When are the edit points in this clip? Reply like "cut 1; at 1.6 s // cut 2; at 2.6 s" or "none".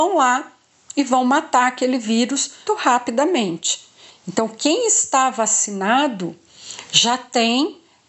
cut 1; at 2.7 s // cut 2; at 4.1 s